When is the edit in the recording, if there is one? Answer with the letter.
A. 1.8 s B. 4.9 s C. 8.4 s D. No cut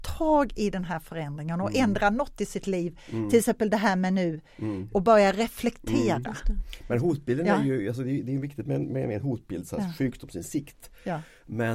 B